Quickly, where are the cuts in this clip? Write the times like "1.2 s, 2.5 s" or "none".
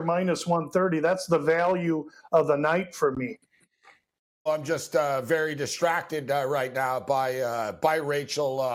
4.5 s